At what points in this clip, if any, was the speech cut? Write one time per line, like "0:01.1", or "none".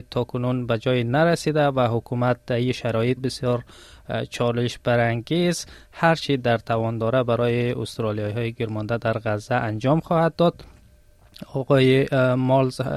0:03.2